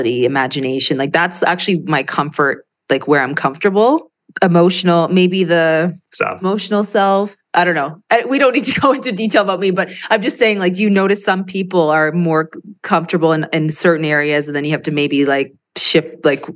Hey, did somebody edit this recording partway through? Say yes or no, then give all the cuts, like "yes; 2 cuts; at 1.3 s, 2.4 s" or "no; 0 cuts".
no; 0 cuts